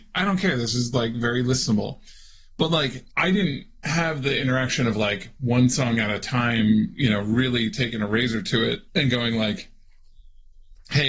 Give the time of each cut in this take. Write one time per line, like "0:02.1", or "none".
0:03.1
0:08.9